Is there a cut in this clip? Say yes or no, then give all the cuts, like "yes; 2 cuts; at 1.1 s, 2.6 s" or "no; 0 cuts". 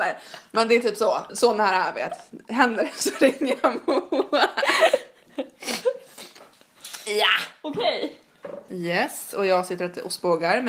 yes; 2 cuts; at 1.3 s, 8.7 s